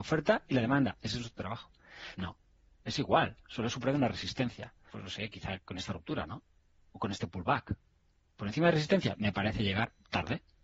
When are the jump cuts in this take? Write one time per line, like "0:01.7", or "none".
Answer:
0:02.1
0:04.9